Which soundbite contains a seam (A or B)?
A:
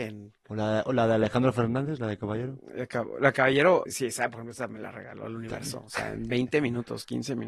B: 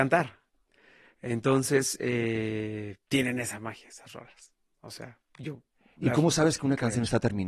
A